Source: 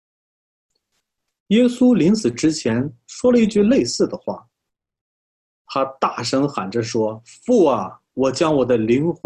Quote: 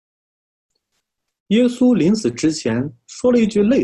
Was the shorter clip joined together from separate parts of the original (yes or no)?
no